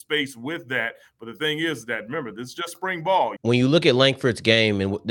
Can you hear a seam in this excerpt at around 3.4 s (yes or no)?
yes